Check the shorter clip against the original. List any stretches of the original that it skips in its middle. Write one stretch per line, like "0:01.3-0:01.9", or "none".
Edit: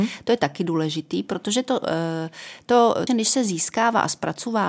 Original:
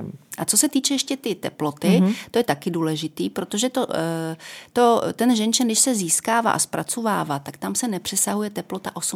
0:05.1-0:05.6